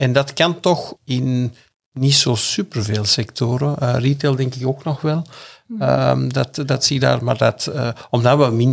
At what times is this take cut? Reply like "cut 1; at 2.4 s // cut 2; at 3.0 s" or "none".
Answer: cut 1; at 1.0 s